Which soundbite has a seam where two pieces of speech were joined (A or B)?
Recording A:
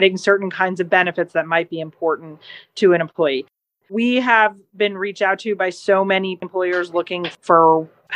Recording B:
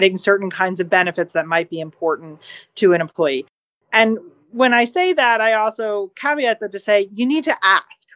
A